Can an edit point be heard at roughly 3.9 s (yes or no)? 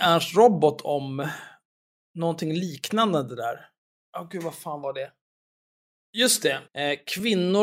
no